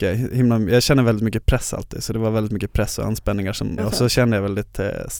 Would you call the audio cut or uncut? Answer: cut